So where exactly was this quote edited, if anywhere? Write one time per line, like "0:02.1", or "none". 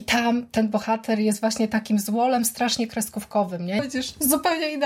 0:03.8